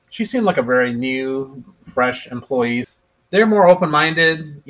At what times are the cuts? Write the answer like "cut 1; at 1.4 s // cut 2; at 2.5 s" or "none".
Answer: none